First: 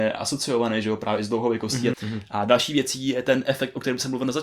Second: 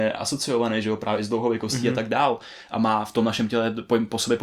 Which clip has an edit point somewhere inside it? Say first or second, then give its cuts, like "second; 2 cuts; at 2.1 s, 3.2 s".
first; 1 cut; at 1.9 s